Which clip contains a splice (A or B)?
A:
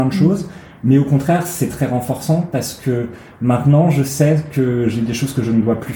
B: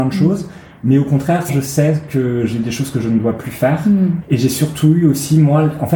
B